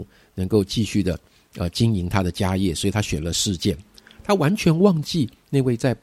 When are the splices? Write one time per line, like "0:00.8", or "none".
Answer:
none